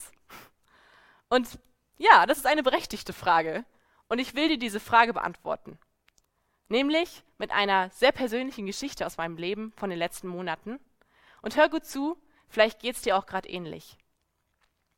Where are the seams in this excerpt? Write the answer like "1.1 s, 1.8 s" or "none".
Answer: none